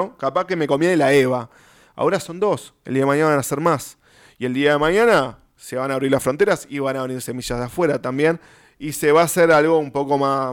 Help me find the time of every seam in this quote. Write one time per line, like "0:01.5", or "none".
none